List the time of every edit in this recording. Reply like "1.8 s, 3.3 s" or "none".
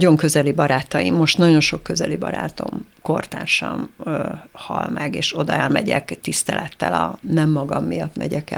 4.5 s, 7.2 s